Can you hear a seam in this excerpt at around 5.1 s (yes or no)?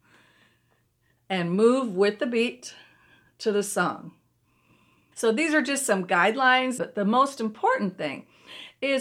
yes